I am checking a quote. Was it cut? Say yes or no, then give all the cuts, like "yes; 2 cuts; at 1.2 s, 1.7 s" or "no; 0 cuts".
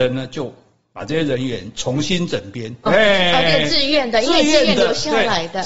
yes; 1 cut; at 2.9 s